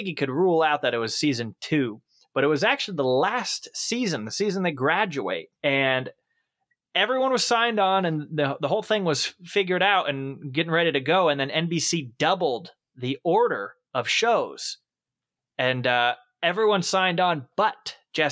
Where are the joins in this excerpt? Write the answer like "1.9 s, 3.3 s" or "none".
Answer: 5.5 s